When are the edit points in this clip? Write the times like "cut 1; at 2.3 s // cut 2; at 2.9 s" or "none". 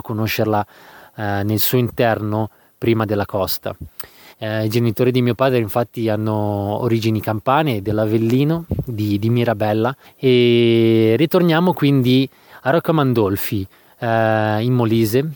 cut 1; at 4.3 s // cut 2; at 10.0 s